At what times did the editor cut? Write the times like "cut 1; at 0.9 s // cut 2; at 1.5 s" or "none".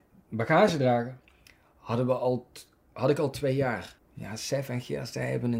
cut 1; at 4.0 s